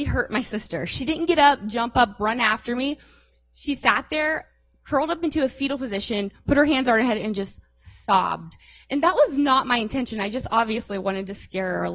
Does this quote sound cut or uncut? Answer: uncut